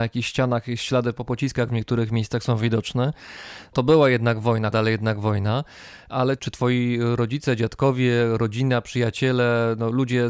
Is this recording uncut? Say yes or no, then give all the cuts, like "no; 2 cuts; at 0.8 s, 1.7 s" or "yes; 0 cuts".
no; 1 cut; at 4.7 s